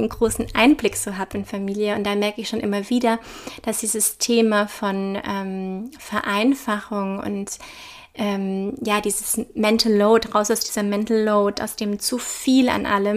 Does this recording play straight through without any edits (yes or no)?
yes